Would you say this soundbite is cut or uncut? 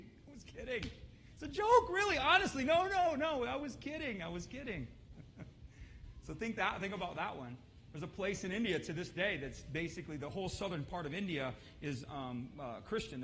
uncut